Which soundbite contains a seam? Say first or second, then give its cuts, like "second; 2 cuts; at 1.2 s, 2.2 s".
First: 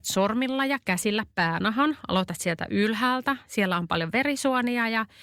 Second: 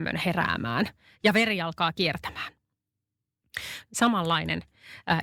second; 1 cut; at 3.9 s